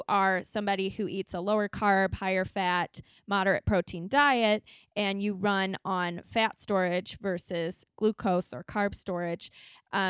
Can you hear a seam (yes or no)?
no